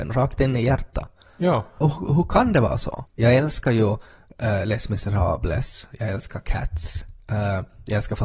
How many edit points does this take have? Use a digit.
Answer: 2